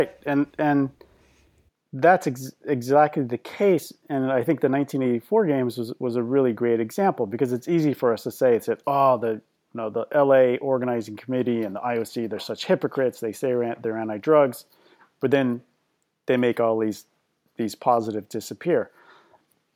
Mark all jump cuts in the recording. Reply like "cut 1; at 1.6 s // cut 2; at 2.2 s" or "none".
none